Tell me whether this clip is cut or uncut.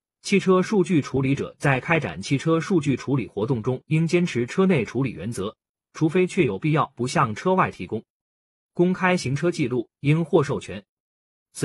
uncut